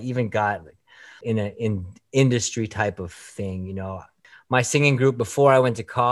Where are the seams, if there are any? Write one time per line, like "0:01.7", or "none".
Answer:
0:01.2